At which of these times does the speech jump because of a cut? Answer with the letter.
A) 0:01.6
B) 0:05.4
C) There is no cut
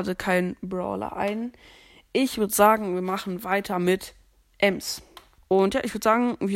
B